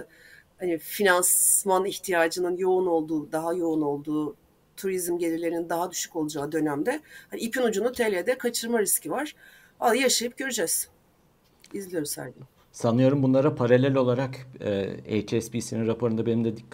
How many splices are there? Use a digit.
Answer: 0